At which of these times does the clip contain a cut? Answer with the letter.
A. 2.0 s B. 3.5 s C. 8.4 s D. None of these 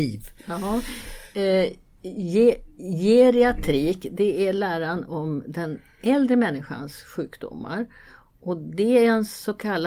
D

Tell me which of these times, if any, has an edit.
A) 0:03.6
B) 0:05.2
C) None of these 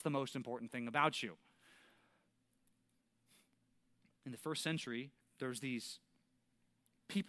B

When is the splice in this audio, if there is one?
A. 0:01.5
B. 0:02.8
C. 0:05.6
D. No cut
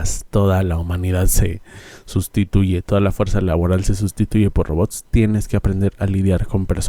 D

